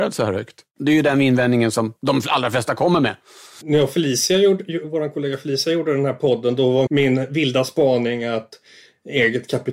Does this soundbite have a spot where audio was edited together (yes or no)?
yes